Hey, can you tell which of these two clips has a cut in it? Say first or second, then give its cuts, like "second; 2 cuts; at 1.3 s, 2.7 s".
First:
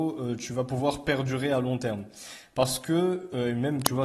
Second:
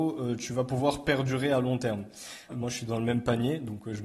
second; 1 cut; at 2.5 s